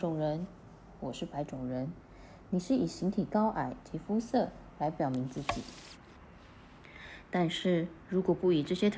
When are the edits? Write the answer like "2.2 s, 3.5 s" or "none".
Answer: none